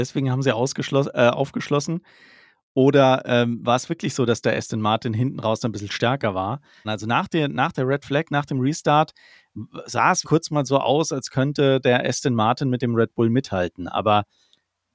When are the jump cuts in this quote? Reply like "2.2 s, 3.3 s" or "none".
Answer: 6.8 s, 10.2 s